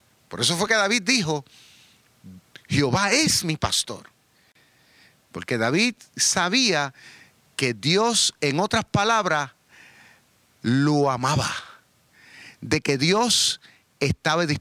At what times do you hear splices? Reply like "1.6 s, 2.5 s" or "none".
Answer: none